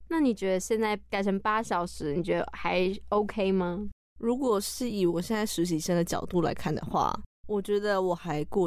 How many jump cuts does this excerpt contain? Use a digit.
0